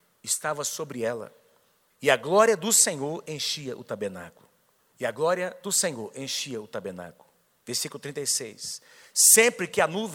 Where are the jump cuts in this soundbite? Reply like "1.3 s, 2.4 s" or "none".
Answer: none